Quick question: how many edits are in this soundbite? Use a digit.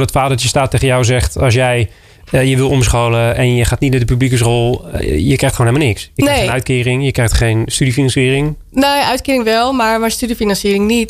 0